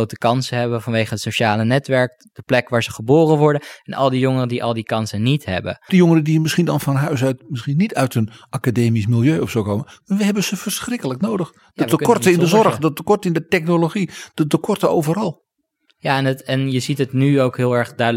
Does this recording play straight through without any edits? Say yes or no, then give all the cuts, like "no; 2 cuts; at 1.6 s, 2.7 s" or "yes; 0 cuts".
no; 1 cut; at 5.9 s